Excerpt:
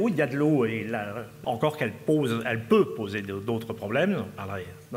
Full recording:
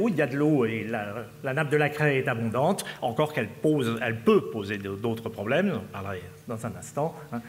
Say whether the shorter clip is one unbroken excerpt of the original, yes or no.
no